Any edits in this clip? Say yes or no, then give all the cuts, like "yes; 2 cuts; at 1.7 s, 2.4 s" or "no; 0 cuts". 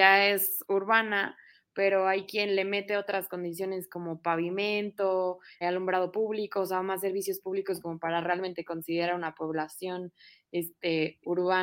yes; 1 cut; at 5.6 s